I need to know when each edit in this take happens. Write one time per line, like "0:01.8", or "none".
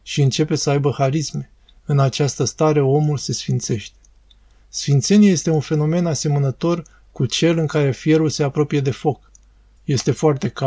0:09.8